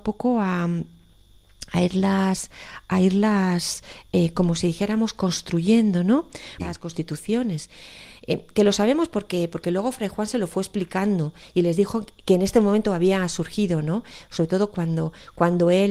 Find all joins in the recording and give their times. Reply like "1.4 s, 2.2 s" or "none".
6.6 s